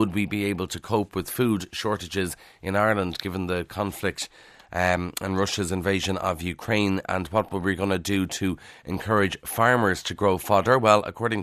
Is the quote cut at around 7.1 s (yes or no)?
no